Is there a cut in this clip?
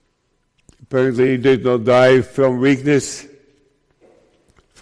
no; 0 cuts

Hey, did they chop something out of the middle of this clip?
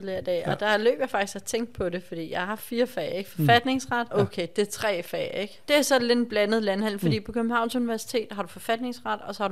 yes; 1 cut; at 4.1 s

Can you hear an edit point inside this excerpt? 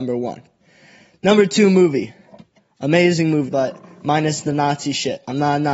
yes; 1 cut; at 3.5 s

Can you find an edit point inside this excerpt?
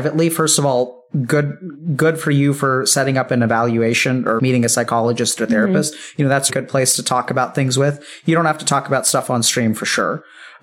yes; 2 cuts; at 4.4 s, 6.5 s

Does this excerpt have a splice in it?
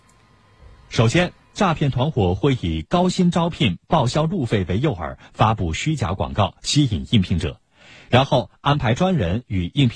no; 0 cuts

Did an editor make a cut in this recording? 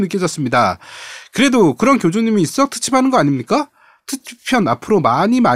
no; 0 cuts

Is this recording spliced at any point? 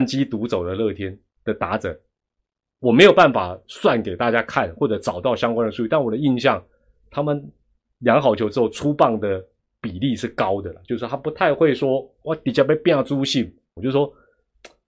yes; 1 cut; at 13.8 s

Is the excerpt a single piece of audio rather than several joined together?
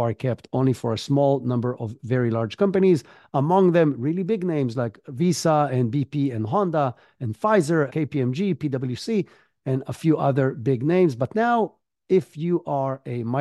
no; 1 cut; at 7.9 s

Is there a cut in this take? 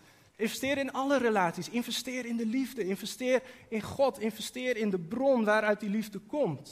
no; 0 cuts

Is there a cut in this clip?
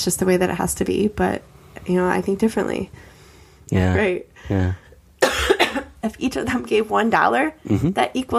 yes; 2 cuts; at 3.7 s, 4.8 s

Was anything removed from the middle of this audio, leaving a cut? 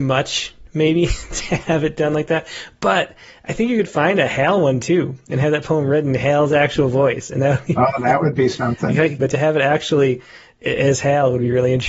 yes; 1 cut; at 9.2 s

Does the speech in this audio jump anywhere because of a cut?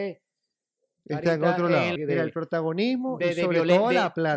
yes; 1 cut; at 2.0 s

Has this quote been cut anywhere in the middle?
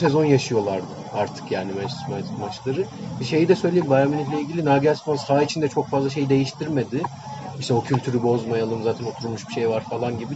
no; 0 cuts

